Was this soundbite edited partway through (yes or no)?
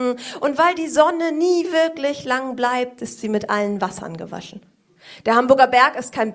no